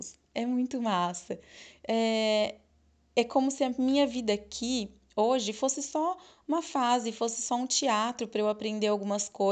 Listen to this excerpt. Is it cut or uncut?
uncut